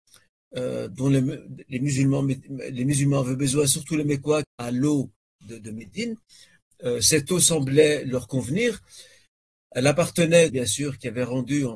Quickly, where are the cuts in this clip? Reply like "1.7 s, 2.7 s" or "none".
4.4 s, 10.5 s